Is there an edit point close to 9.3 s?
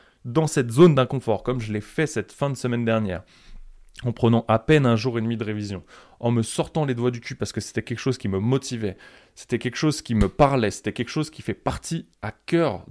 no; 0 cuts

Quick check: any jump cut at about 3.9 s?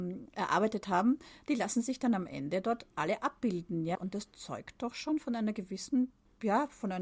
yes; 1 cut; at 3.9 s

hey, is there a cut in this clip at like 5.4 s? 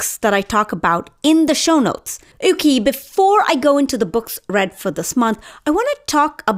no; 1 cut; at 2.3 s

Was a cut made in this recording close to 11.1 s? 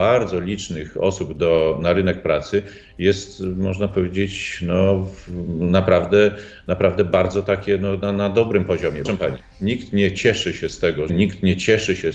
yes; 2 cuts; at 9.0 s, 11.1 s

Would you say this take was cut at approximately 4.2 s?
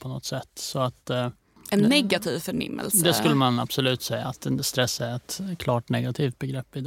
no; 0 cuts

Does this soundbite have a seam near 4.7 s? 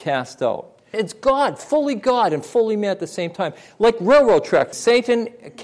yes; 2 cuts; at 0.9 s, 4.7 s

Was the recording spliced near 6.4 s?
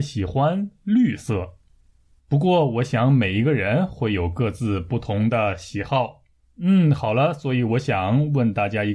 yes; 2 cuts; at 2.2 s, 6.4 s

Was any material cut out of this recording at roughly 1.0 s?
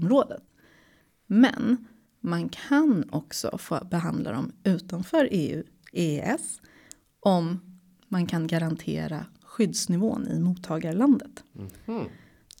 no; 0 cuts

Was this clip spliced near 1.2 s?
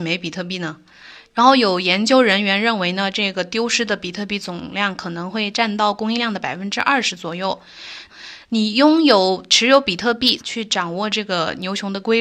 yes; 3 cuts; at 1.2 s, 8.1 s, 10.4 s

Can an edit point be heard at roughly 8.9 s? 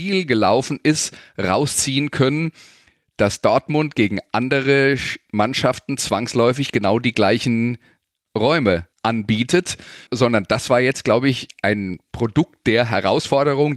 yes; 2 cuts; at 8.9 s, 10.1 s

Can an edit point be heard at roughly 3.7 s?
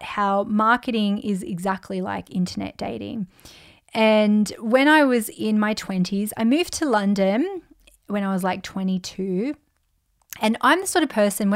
no; 0 cuts

